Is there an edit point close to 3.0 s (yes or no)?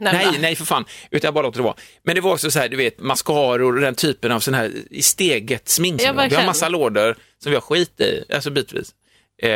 yes